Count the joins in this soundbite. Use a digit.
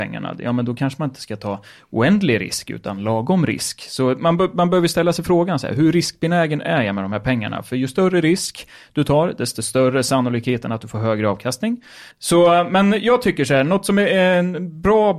1